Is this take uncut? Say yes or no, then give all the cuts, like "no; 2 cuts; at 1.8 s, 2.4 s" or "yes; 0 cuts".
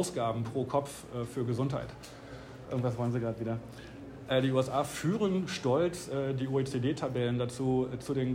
no; 2 cuts; at 2.6 s, 4.3 s